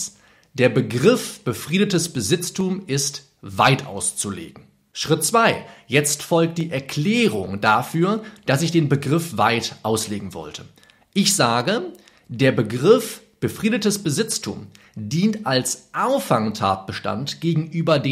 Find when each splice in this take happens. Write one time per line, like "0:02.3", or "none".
none